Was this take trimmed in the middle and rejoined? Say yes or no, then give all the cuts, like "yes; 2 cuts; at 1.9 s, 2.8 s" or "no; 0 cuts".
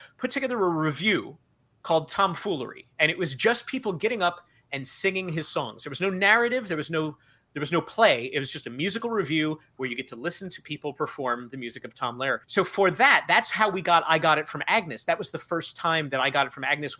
yes; 1 cut; at 12.4 s